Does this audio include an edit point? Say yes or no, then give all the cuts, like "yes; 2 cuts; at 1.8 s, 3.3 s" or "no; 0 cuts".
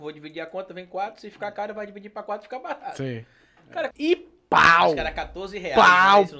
yes; 1 cut; at 3.9 s